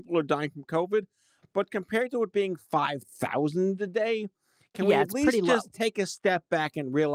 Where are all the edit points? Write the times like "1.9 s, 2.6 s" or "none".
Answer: none